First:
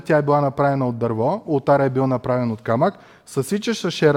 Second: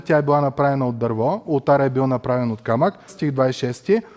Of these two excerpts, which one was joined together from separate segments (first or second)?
second